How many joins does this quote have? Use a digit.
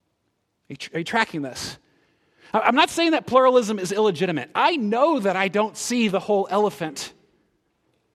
0